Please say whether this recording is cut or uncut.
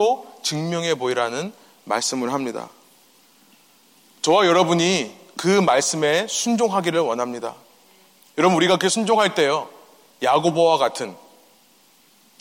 uncut